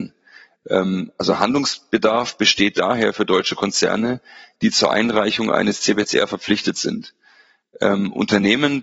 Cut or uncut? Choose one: uncut